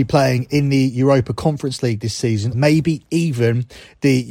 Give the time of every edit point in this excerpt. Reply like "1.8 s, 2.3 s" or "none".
2.5 s